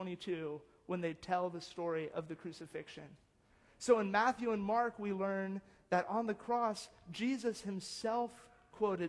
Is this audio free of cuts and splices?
yes; 0 cuts

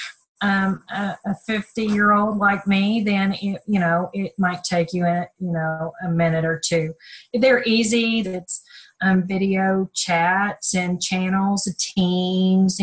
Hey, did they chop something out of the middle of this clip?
yes; 1 cut; at 8.2 s

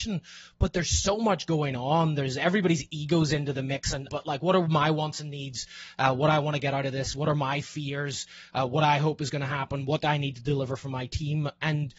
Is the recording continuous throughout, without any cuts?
no; 1 cut; at 4.1 s

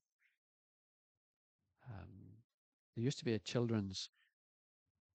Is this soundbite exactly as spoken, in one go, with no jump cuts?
yes; 0 cuts

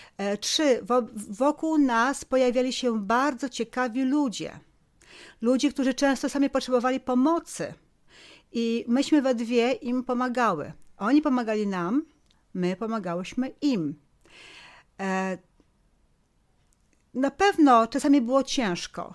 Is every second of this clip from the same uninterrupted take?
yes; 0 cuts

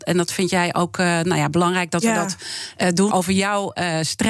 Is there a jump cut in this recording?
yes; 1 cut; at 3.1 s

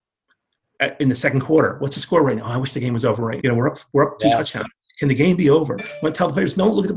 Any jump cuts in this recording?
yes; 2 cuts; at 3.4 s, 5.8 s

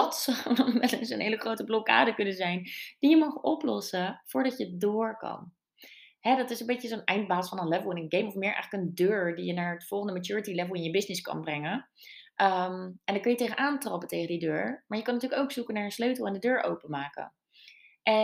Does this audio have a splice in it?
no; 0 cuts

